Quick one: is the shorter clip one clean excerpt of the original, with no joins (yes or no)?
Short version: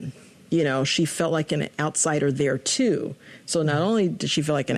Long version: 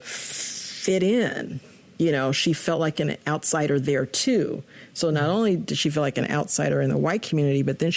yes